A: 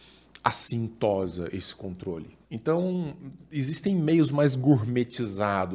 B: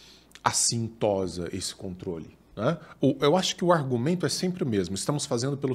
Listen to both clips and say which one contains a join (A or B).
A